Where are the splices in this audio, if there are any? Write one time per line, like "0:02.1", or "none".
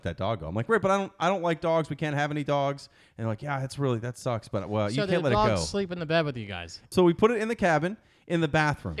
0:06.9